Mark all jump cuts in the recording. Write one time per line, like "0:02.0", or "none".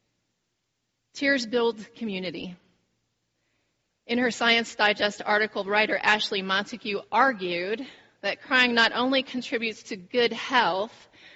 none